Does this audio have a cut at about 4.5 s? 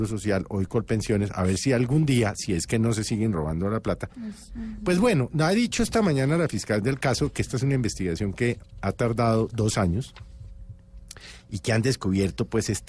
yes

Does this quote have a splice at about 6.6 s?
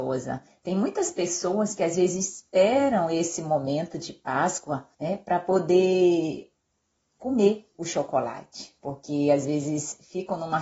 no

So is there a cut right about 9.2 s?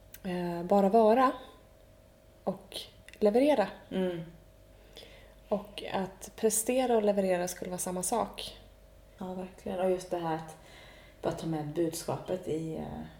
yes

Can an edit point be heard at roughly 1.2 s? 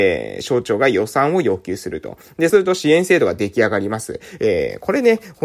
no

